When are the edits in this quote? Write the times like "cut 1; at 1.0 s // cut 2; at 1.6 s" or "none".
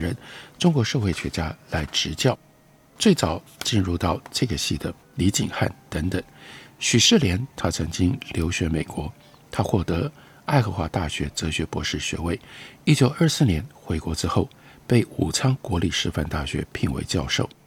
cut 1; at 5.0 s